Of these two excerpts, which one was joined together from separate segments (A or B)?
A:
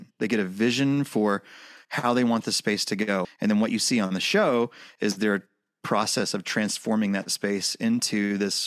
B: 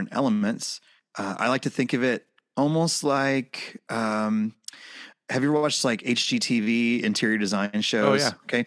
A